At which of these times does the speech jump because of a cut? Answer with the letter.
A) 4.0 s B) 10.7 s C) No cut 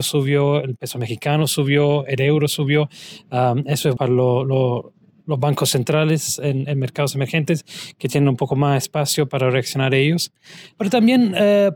A